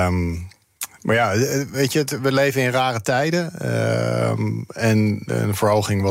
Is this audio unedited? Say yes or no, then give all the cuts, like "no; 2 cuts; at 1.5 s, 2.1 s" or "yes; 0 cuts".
yes; 0 cuts